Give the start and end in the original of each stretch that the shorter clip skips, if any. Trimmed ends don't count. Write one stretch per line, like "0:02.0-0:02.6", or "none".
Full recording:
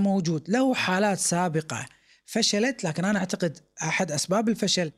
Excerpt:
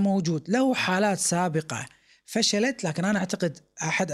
none